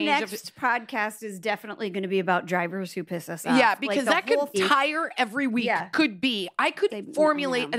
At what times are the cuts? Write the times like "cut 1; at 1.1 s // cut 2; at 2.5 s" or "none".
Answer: cut 1; at 4.5 s // cut 2; at 6.9 s